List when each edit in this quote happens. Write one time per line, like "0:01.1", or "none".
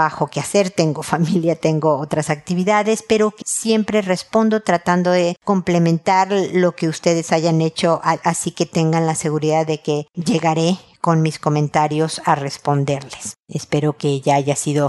0:03.4
0:08.2

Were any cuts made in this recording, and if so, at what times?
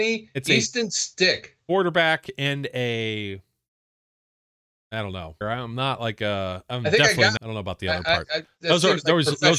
0:05.4
0:07.4

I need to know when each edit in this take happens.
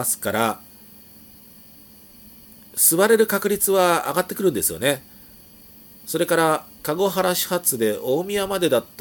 0:06.7

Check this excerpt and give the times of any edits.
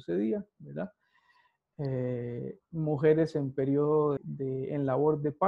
0:04.2

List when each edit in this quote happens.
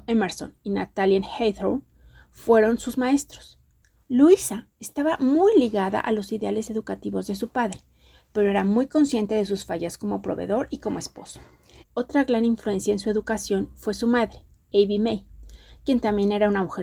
0:04.0
0:11.8

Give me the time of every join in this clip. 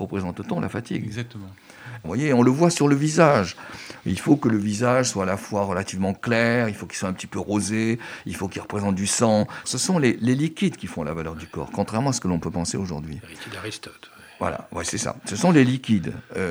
0:02.0
0:09.6

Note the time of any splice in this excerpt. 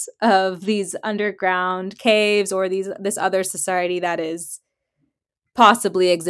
none

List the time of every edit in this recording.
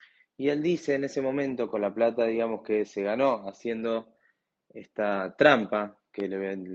none

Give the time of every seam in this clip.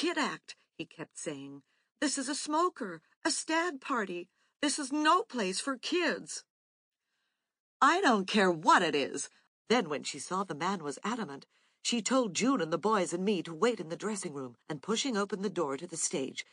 0:09.5
0:14.6

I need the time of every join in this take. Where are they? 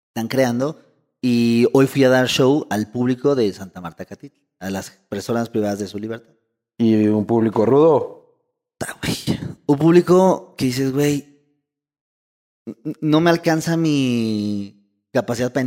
none

